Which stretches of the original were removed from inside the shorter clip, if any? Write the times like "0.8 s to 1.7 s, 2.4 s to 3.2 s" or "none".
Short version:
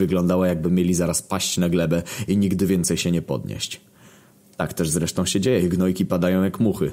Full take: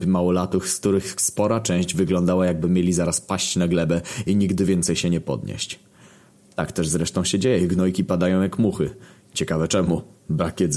none